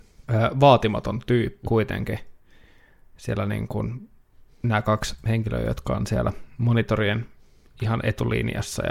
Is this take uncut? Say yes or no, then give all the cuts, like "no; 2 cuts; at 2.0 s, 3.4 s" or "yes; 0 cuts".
no; 1 cut; at 1.7 s